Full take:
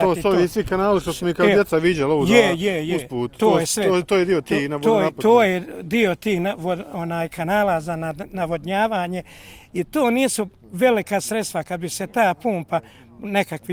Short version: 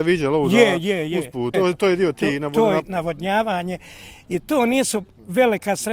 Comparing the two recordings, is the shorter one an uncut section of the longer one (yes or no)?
no